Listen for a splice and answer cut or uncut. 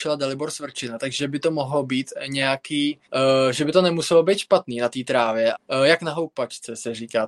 cut